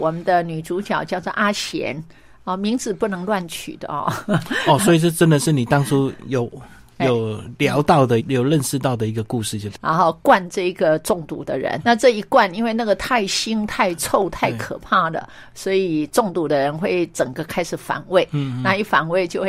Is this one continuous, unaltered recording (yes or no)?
no